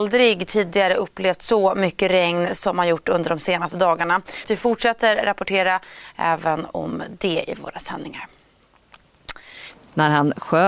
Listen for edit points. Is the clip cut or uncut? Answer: cut